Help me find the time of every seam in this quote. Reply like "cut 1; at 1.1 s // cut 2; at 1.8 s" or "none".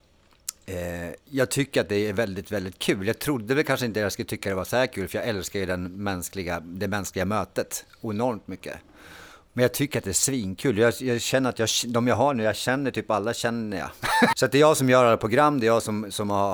cut 1; at 1.2 s // cut 2; at 14.3 s